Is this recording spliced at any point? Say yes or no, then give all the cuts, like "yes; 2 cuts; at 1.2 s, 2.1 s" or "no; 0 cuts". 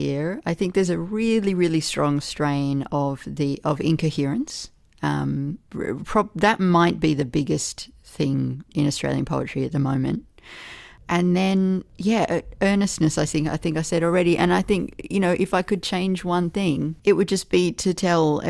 yes; 2 cuts; at 5.6 s, 8.7 s